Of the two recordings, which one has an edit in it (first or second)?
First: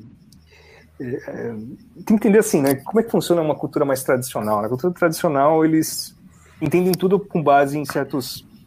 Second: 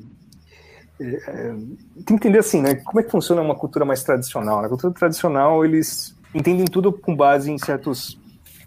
second